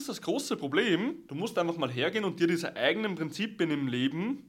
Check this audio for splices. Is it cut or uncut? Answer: uncut